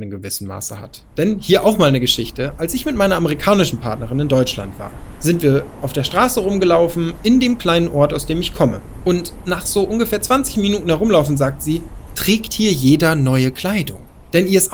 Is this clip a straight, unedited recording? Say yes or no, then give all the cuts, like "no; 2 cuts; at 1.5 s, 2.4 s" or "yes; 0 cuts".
yes; 0 cuts